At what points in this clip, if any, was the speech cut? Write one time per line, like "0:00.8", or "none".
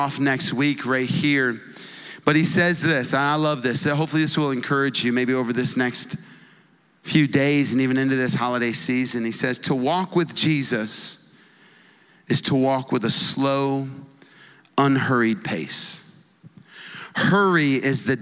none